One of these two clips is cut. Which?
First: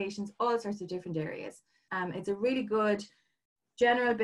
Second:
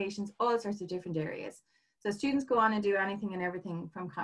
first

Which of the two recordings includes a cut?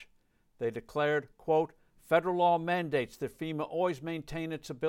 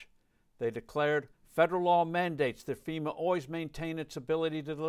second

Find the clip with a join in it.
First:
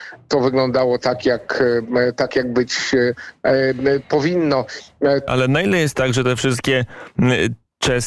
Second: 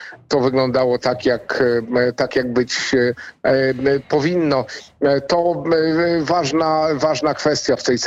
first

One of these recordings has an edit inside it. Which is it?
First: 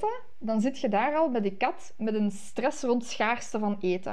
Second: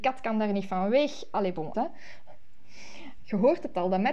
second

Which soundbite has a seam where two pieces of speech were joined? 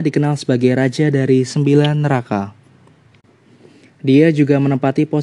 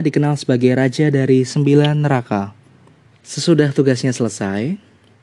second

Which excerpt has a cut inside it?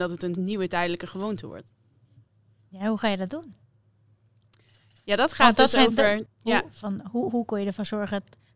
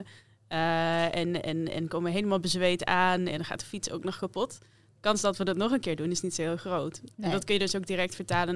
first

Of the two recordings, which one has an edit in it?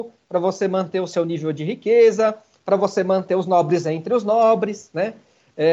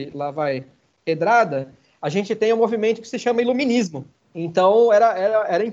second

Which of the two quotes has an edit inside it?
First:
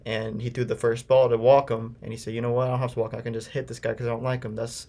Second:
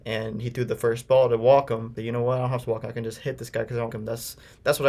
second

